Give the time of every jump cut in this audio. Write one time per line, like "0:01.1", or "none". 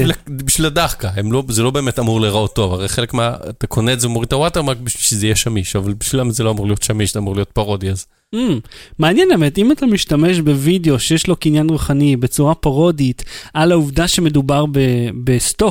none